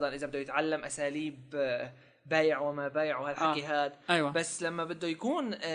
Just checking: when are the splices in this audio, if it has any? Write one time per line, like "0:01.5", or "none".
none